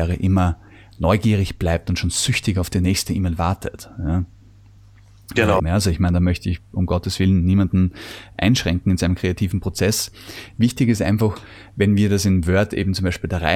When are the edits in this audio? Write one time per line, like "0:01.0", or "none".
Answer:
0:05.6